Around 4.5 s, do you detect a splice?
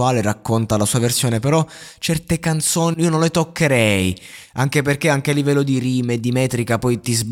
no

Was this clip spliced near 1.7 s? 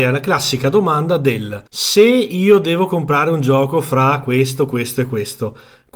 yes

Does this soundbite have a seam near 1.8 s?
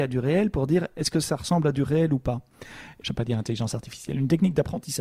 no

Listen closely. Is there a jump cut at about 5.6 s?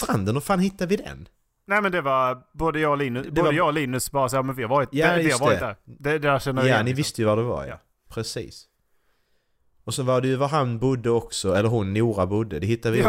no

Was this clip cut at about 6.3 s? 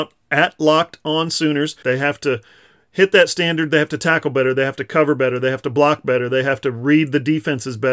no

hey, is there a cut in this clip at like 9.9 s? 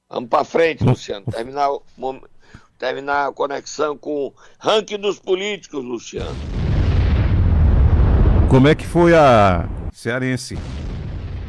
yes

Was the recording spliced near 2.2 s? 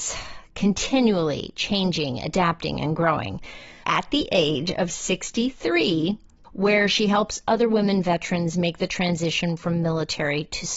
no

